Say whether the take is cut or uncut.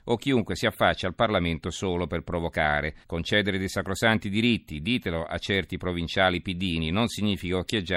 cut